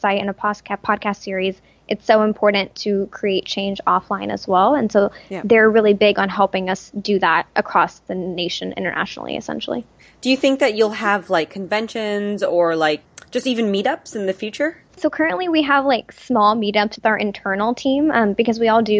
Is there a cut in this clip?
yes; 2 cuts; at 15.0 s, 17.0 s

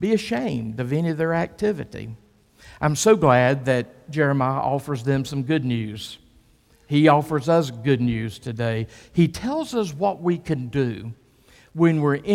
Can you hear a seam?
no; 0 cuts

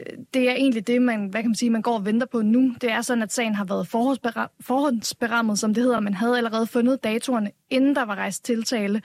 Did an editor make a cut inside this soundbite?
no; 0 cuts

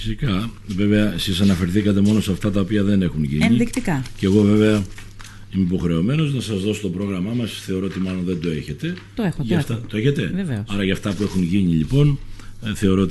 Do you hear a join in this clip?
no; 0 cuts

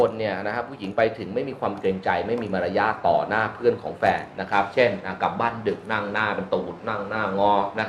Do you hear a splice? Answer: no; 0 cuts

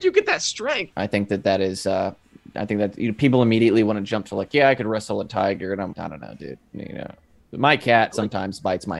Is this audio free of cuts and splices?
no; 2 cuts; at 0.9 s, 5.9 s

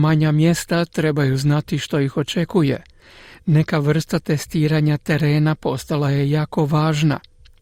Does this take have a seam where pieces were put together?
no; 0 cuts

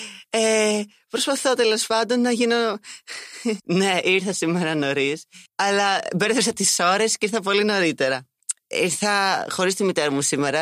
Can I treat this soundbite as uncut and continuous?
no; 2 cuts; at 3.6 s, 5.5 s

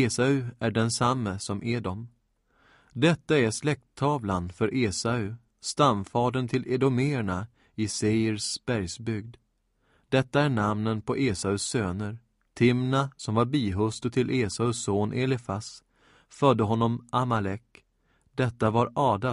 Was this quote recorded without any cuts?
no; 1 cut; at 12.4 s

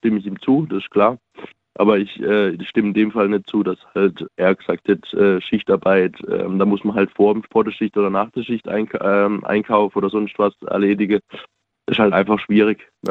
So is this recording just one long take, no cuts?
no; 1 cut; at 4.3 s

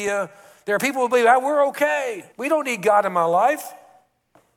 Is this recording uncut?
no; 1 cut; at 2.3 s

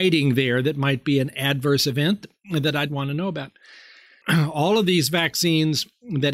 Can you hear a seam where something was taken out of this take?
yes; 1 cut; at 4.2 s

